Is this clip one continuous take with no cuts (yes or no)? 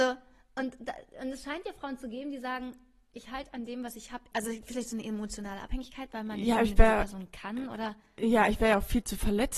no